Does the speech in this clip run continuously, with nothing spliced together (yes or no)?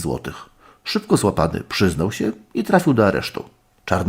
yes